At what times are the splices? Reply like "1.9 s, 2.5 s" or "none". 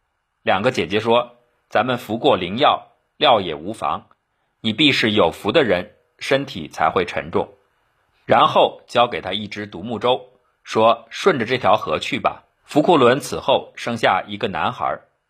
8.1 s, 12.6 s